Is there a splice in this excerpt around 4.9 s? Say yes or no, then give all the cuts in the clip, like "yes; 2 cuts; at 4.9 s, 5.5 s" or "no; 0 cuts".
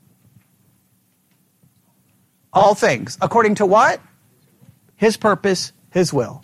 yes; 1 cut; at 4.9 s